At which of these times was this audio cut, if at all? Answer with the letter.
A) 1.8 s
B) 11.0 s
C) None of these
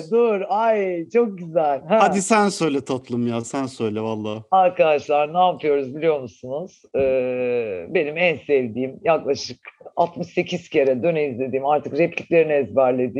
B